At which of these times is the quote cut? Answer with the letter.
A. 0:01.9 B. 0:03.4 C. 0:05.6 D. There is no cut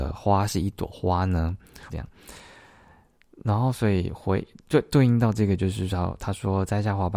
A